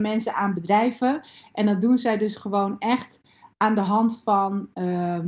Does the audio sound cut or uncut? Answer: uncut